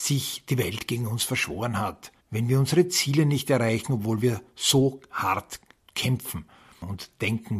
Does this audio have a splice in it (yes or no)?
yes